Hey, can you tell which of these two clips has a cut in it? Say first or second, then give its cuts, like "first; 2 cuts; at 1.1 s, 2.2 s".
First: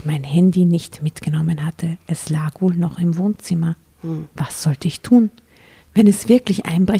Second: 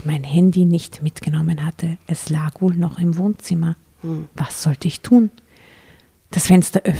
first; 1 cut; at 5.8 s